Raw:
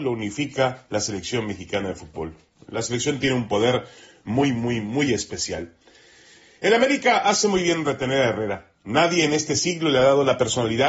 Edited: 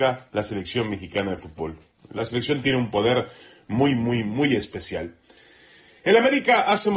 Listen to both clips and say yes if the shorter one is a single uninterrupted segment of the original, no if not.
yes